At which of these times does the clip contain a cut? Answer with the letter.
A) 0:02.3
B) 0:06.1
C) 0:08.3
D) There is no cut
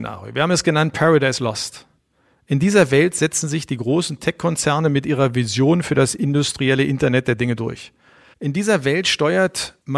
C